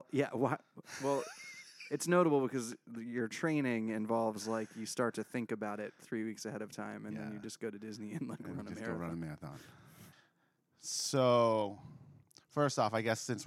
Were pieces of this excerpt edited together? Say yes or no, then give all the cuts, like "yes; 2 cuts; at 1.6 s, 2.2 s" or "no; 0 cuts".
no; 0 cuts